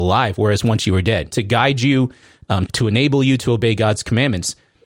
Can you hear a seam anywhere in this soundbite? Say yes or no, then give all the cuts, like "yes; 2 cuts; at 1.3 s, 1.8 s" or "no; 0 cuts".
yes; 2 cuts; at 1.3 s, 2.7 s